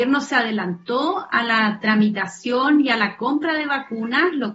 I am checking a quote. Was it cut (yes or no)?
no